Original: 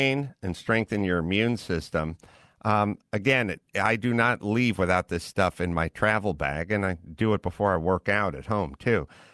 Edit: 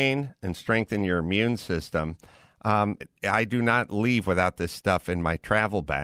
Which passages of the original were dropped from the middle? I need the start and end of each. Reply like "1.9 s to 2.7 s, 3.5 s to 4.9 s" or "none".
3.0 s to 3.5 s